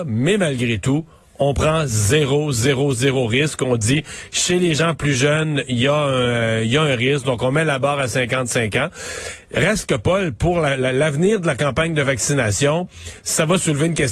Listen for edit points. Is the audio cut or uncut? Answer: uncut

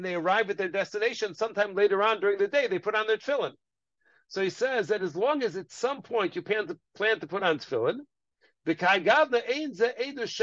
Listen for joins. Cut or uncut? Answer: uncut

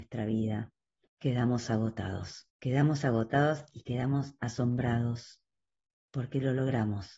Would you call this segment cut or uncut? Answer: cut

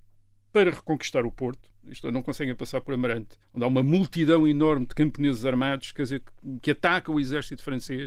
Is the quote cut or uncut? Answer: cut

